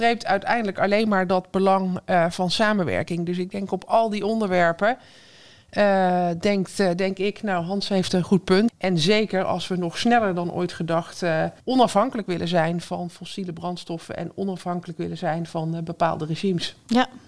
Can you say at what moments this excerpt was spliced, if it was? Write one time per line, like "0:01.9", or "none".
0:08.7
0:11.6